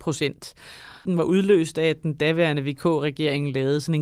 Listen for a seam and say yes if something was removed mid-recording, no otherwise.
yes